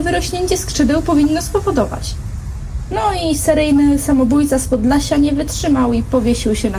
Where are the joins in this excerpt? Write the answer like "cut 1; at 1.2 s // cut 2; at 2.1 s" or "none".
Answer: none